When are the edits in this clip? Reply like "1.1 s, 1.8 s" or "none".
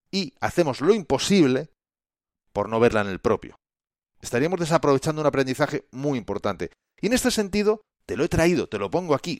none